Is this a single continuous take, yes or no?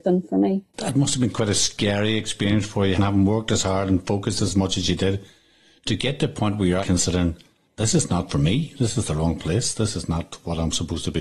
no